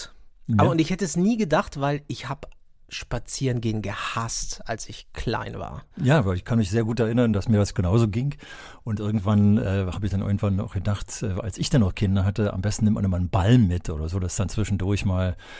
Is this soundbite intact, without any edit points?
yes; 0 cuts

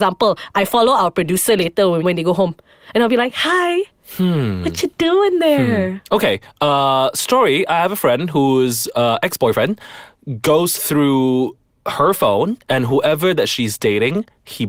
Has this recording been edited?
no; 0 cuts

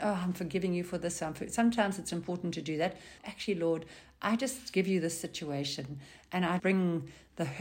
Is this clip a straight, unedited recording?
no; 2 cuts; at 3.2 s, 6.6 s

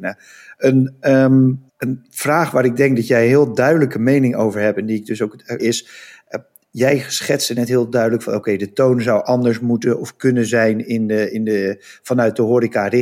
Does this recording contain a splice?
yes; 2 cuts; at 1.7 s, 5.6 s

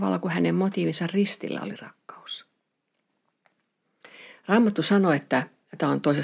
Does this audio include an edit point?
no; 0 cuts

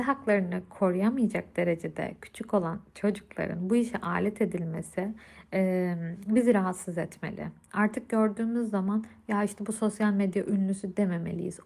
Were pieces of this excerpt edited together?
no; 0 cuts

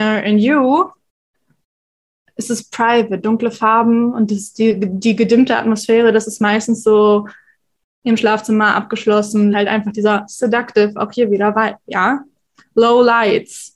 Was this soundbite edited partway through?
yes; 1 cut; at 9.5 s

